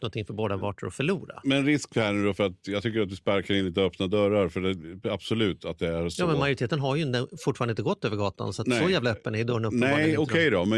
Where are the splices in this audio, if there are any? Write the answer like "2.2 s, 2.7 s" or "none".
none